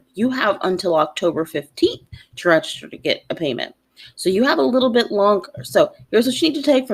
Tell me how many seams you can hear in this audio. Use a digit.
0